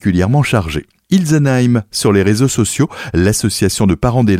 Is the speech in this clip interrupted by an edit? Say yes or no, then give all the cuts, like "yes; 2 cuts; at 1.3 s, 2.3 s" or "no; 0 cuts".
no; 0 cuts